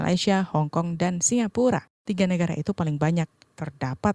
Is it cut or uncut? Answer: uncut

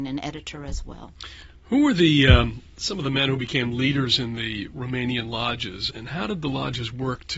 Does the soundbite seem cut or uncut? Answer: cut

